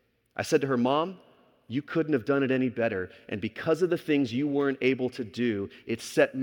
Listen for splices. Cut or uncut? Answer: uncut